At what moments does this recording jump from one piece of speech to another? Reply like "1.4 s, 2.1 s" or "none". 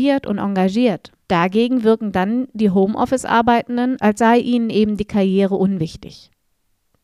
1.2 s, 4.0 s